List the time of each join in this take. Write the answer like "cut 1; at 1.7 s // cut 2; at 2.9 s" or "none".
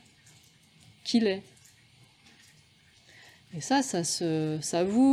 none